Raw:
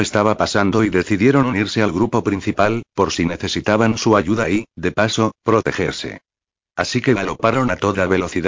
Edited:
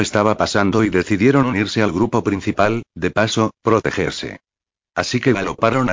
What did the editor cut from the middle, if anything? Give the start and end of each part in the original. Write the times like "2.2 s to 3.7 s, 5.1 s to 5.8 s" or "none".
2.9 s to 4.7 s